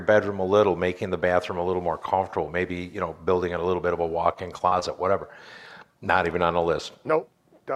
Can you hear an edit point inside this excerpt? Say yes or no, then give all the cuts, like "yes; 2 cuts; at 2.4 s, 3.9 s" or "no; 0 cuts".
no; 0 cuts